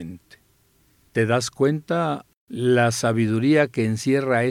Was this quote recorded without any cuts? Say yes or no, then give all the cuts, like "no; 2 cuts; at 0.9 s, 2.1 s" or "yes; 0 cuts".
no; 1 cut; at 2.3 s